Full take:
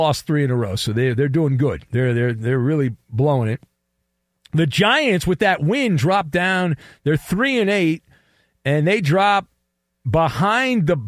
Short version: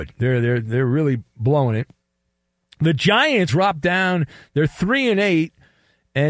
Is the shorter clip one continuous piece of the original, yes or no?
no